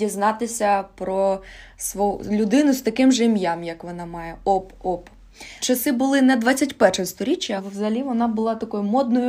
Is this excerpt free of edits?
no; 2 cuts; at 5.6 s, 7.6 s

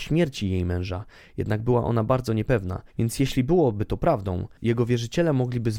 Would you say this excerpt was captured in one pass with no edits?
no; 1 cut; at 2.9 s

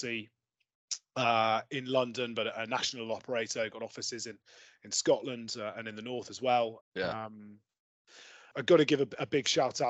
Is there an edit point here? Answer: yes; 2 cuts; at 6.8 s, 8.5 s

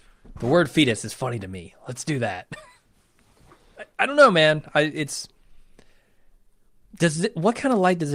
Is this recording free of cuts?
yes; 0 cuts

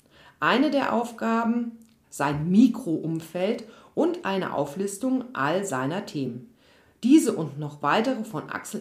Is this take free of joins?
no; 1 cut; at 2.0 s

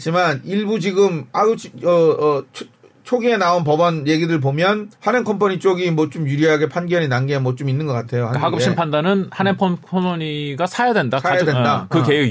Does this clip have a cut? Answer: yes; 1 cut; at 5.0 s

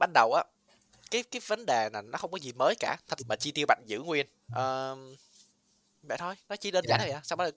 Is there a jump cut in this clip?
yes; 2 cuts; at 3.2 s, 4.5 s

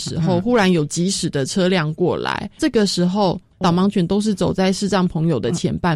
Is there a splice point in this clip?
yes; 1 cut; at 3.5 s

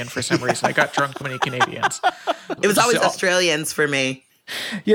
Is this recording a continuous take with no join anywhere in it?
no; 2 cuts; at 1.2 s, 2.6 s

